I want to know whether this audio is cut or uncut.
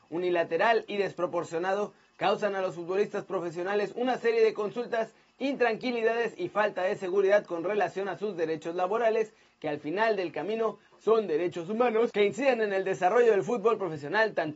uncut